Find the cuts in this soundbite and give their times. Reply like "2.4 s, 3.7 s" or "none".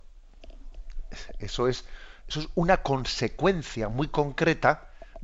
none